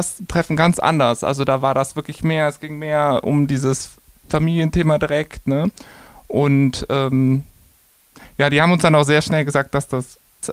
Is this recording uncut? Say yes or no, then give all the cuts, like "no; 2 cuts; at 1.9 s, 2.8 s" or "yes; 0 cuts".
yes; 0 cuts